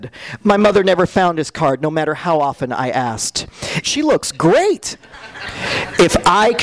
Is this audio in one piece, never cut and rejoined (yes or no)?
no